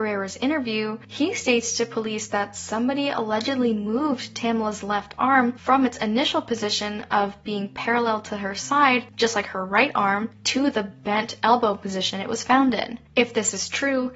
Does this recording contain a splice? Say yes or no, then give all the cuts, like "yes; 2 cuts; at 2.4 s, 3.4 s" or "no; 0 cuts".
no; 0 cuts